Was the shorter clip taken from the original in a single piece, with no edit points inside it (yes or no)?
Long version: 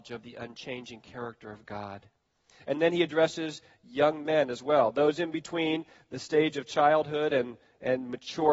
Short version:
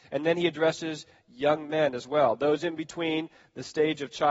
yes